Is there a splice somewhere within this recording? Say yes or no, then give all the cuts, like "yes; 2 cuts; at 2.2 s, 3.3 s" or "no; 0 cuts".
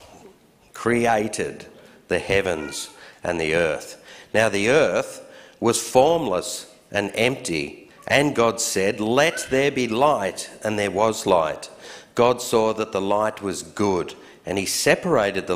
yes; 1 cut; at 7.9 s